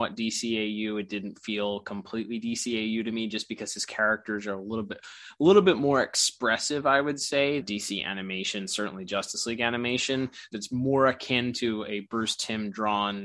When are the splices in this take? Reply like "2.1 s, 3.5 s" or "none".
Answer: 7.6 s, 10.5 s